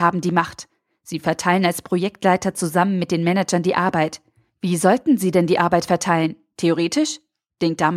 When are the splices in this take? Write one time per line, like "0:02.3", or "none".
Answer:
none